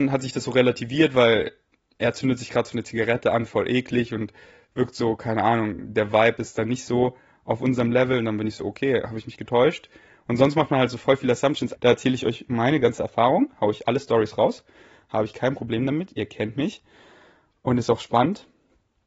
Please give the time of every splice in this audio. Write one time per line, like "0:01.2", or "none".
0:11.8